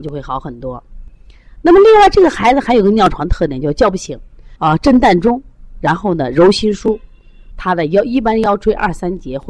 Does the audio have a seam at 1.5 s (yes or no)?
no